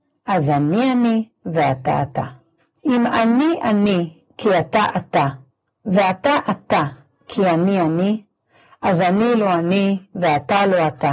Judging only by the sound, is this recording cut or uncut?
cut